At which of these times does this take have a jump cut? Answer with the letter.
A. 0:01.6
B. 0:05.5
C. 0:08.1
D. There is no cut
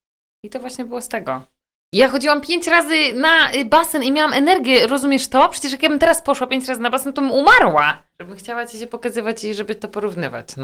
C